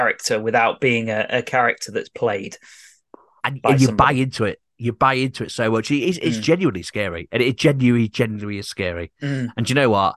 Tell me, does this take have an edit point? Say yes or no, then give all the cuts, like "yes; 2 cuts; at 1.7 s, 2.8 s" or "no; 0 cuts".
no; 0 cuts